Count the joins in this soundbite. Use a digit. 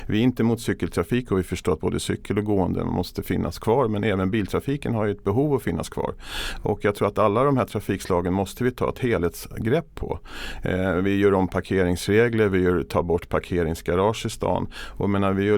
0